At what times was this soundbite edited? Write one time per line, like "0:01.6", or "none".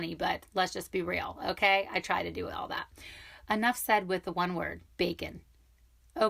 0:03.5
0:04.9

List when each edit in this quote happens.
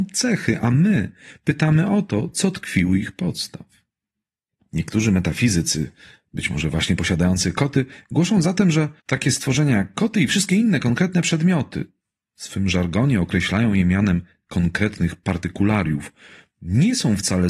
0:09.0

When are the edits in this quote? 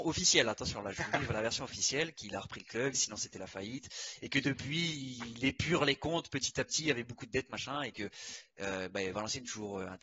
0:02.9

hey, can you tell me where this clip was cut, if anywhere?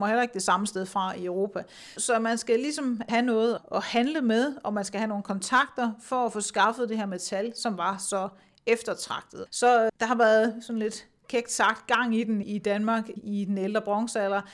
0:09.5

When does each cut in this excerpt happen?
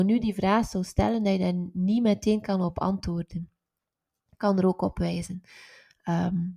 none

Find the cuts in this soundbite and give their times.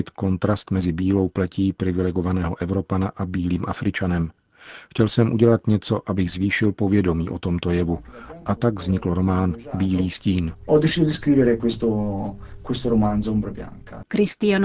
none

